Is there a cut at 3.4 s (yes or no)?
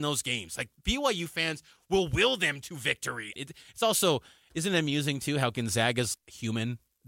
yes